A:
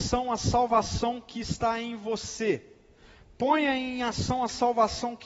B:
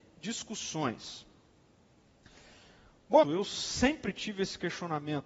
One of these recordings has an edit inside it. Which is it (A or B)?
B